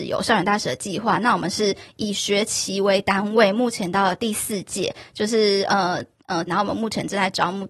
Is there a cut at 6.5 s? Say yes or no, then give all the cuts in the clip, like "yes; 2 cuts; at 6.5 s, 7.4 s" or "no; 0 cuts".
yes; 1 cut; at 6.5 s